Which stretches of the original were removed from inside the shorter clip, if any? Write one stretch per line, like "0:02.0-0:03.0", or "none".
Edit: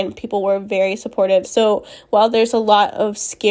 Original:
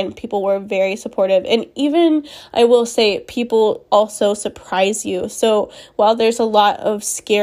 0:01.4-0:05.3